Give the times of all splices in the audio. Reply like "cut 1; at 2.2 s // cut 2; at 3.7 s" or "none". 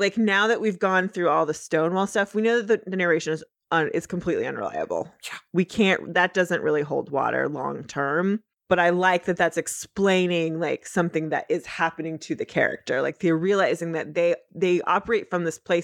none